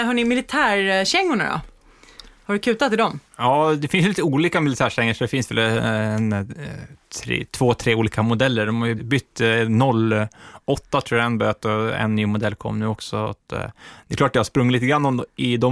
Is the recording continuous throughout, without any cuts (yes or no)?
no